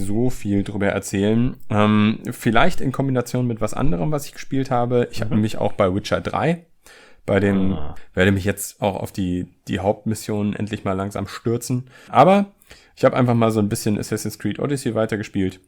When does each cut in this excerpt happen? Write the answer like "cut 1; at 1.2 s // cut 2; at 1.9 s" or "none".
cut 1; at 8.0 s // cut 2; at 12.1 s